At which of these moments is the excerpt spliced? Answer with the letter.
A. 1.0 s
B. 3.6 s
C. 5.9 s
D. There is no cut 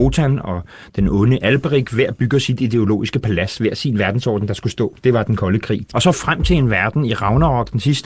C